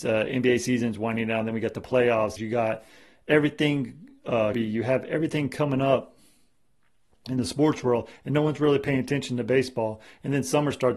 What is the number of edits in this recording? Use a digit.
2